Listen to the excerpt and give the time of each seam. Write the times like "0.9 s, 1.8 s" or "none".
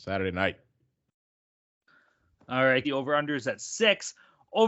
2.8 s